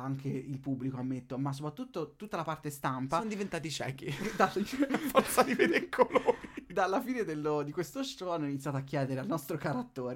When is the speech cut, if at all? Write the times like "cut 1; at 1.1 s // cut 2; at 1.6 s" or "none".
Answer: none

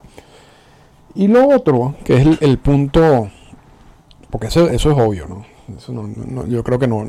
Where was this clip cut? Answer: none

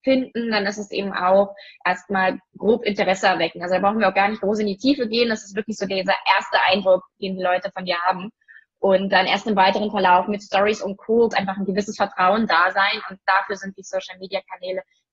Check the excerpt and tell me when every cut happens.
cut 1; at 11.3 s // cut 2; at 13.8 s

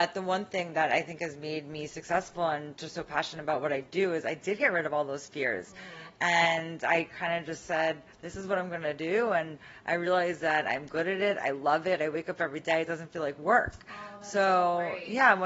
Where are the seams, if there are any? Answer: none

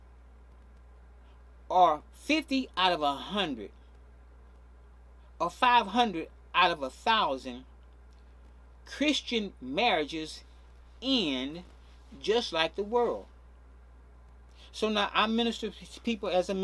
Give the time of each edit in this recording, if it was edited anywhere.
none

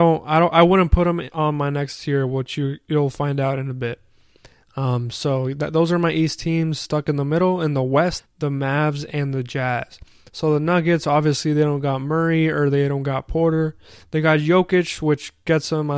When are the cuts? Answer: cut 1; at 8.2 s

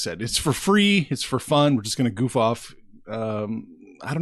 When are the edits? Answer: none

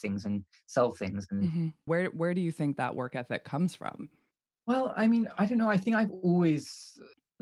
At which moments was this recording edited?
cut 1; at 1.9 s

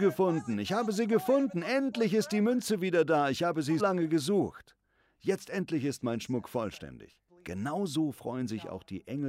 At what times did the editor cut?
cut 1; at 3.8 s // cut 2; at 7.3 s

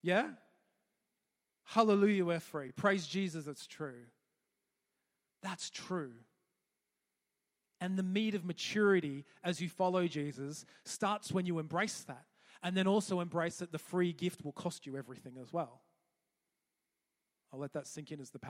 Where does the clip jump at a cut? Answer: none

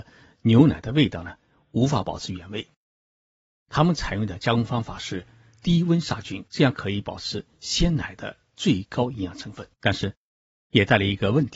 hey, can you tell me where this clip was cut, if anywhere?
cut 1; at 6.5 s // cut 2; at 9.7 s

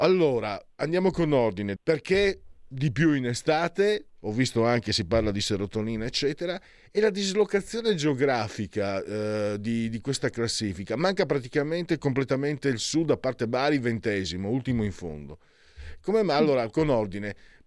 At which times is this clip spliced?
cut 1; at 1.8 s

